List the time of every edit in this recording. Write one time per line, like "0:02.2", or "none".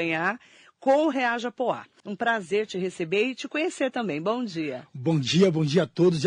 0:02.0